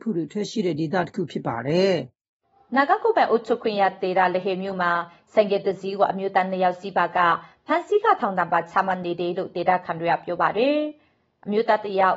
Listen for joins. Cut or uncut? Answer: uncut